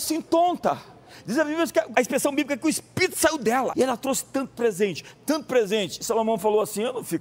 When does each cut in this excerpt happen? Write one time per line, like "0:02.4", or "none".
0:01.9
0:03.7